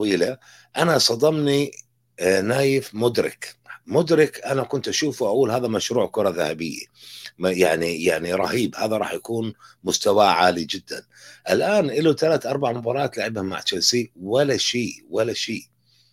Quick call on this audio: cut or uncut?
uncut